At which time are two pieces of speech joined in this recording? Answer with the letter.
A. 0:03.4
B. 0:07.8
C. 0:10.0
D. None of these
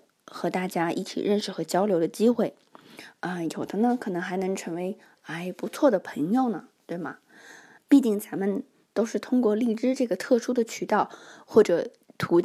B